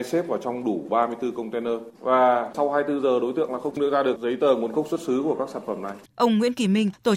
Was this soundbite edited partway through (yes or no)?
yes